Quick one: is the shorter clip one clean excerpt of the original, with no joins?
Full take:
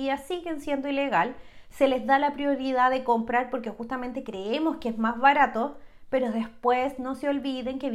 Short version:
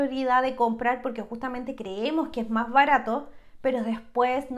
yes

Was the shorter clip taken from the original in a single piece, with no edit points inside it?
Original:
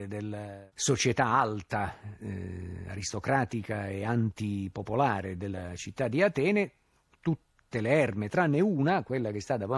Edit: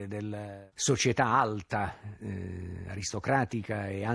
yes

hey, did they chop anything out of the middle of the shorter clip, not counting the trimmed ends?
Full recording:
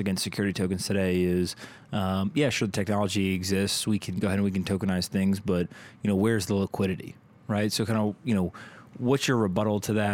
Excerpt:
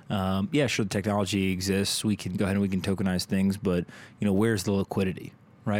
no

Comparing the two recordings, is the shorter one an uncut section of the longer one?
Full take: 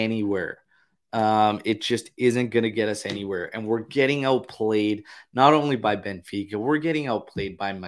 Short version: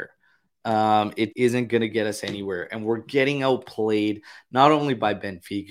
no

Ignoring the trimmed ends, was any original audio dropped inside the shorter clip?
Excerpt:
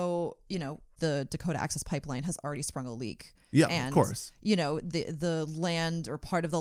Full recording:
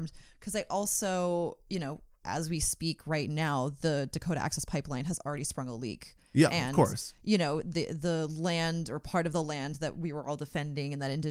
yes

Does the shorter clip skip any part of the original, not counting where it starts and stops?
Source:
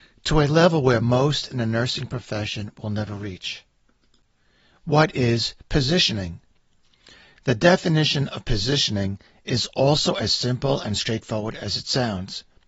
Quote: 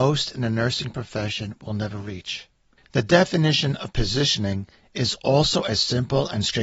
yes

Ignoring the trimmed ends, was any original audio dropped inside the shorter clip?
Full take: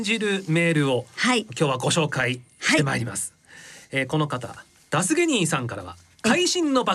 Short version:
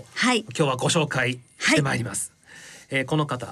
no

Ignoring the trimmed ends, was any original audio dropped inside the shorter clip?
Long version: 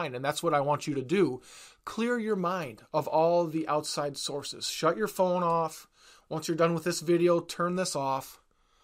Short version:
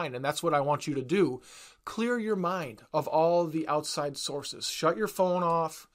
no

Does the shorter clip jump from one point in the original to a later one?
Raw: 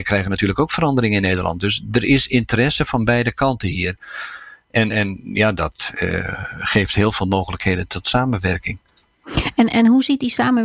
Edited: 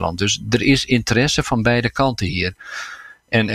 no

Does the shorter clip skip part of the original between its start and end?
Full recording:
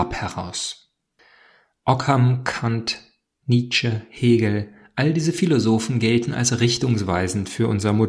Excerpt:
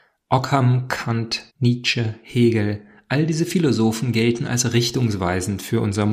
yes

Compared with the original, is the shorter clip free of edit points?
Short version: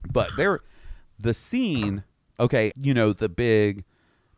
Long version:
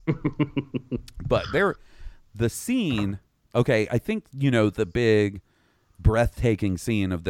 no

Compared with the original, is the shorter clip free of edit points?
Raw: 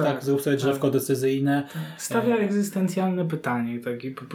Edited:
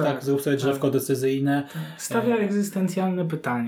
yes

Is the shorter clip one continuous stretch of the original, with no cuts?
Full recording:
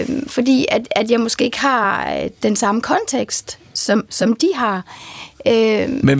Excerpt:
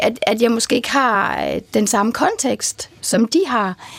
no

